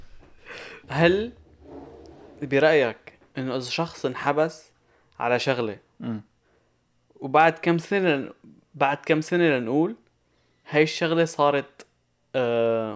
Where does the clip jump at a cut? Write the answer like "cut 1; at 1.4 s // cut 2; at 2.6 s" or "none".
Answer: none